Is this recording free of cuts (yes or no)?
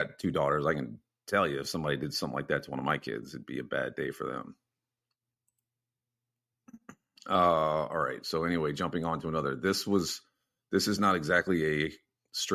yes